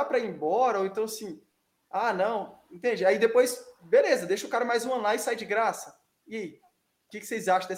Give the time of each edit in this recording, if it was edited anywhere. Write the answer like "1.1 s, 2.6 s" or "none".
none